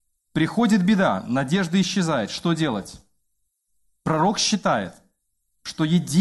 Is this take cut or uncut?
uncut